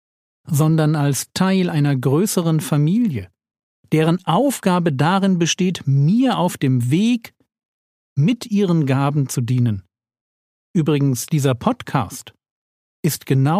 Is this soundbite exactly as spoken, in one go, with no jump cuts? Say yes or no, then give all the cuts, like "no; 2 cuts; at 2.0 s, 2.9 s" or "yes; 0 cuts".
no; 1 cut; at 3.8 s